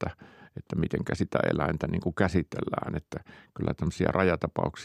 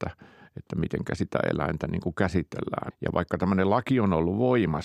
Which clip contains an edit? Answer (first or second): second